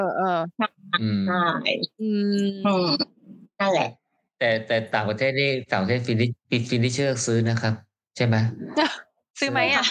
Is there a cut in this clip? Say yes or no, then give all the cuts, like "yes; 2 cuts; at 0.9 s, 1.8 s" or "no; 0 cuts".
no; 0 cuts